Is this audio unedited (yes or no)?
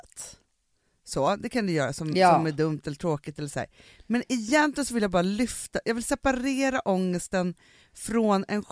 yes